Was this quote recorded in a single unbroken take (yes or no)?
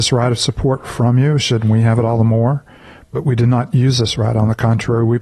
yes